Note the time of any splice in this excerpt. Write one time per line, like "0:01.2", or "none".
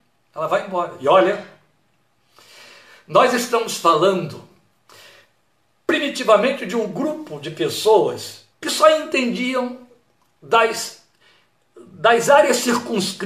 0:08.5